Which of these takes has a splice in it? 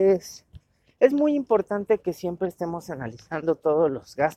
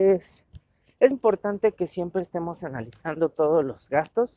second; 1 cut; at 1.1 s

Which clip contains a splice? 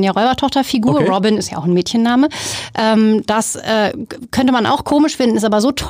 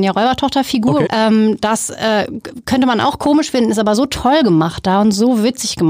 second; 1 cut; at 1.1 s

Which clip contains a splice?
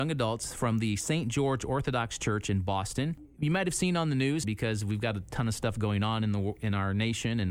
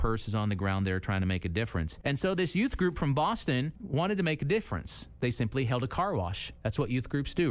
first; 1 cut; at 4.4 s

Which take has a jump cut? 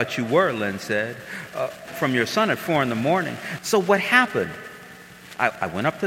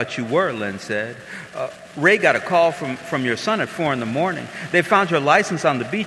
first; 2 cuts; at 1.9 s, 3.6 s

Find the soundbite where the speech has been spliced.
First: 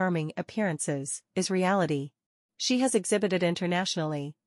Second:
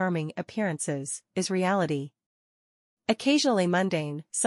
first; 1 cut; at 2.4 s

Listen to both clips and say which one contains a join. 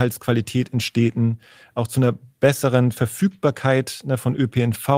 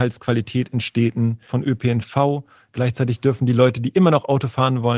second; 1 cut; at 1.5 s

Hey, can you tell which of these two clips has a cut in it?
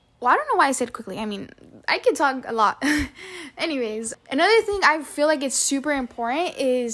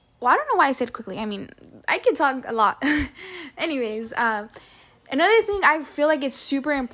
first; 1 cut; at 4.1 s

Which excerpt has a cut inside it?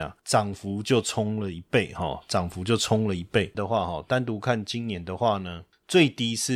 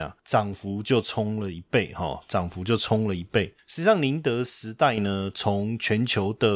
first; 1 cut; at 3.5 s

